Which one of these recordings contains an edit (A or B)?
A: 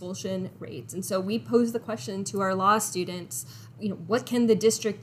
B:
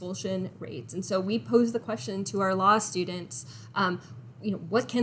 A